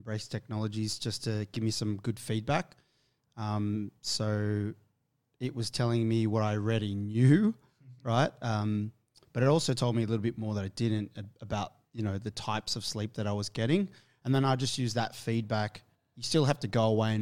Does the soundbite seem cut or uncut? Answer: uncut